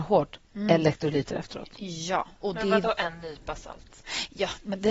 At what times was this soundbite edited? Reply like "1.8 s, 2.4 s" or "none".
none